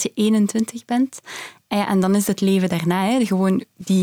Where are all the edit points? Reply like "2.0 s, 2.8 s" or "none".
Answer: none